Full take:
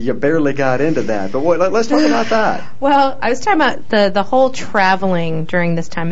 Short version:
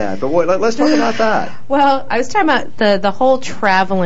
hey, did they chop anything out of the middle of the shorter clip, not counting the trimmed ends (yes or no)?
no